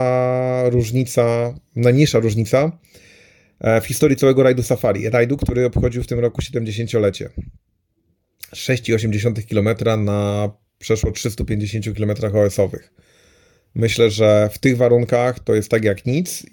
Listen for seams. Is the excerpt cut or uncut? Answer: uncut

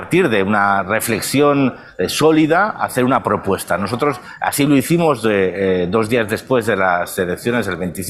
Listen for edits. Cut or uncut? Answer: uncut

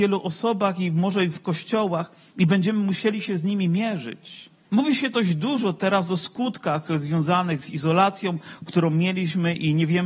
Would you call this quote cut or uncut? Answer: cut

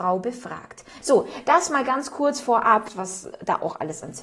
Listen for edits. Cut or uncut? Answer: cut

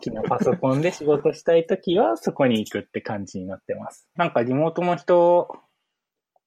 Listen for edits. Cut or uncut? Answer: cut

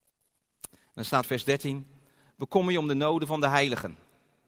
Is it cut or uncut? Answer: cut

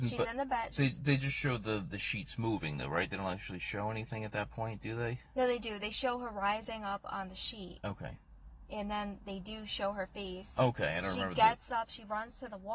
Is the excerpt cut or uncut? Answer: uncut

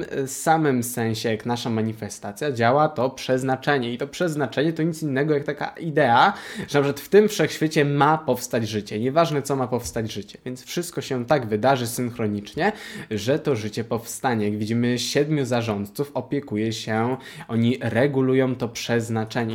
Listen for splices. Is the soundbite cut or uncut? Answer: uncut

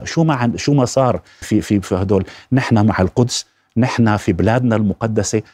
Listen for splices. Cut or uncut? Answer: cut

